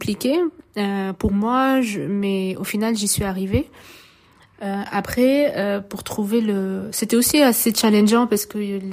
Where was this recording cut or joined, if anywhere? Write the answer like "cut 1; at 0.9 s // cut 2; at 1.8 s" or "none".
none